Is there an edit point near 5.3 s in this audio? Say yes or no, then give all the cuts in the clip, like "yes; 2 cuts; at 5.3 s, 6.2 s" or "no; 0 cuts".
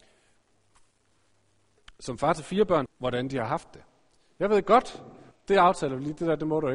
yes; 2 cuts; at 2.9 s, 5.3 s